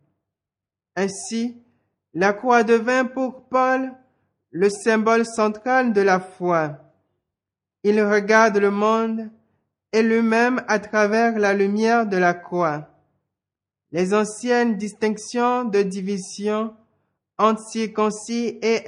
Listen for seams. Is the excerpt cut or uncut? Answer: uncut